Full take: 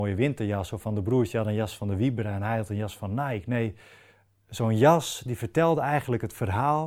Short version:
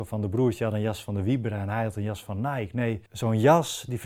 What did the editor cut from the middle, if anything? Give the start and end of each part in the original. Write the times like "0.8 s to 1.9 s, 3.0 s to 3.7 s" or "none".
3.8 s to 4.4 s